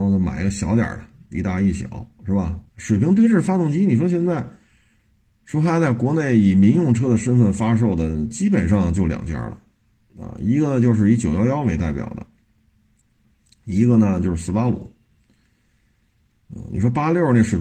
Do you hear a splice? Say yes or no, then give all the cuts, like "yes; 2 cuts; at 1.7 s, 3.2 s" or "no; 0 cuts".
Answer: yes; 1 cut; at 2.7 s